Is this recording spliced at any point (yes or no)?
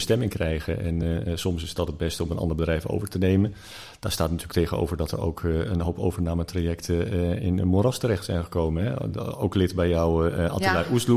no